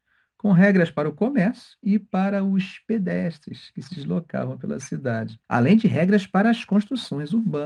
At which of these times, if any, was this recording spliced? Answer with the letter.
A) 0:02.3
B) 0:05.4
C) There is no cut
B